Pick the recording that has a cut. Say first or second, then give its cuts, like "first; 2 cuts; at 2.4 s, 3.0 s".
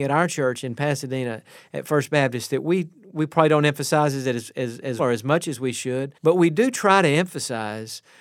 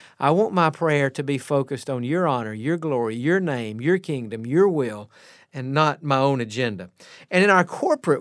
first; 2 cuts; at 5.0 s, 6.2 s